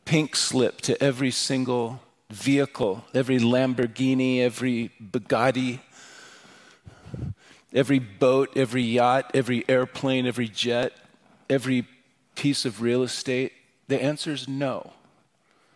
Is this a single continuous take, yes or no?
yes